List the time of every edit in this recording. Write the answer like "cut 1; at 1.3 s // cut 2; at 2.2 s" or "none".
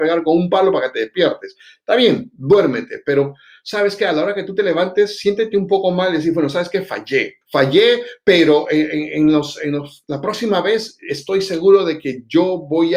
cut 1; at 7.4 s